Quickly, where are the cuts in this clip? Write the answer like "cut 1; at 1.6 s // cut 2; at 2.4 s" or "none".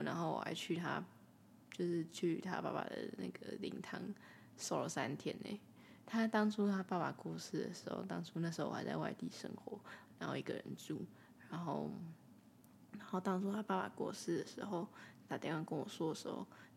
cut 1; at 6.0 s // cut 2; at 15.3 s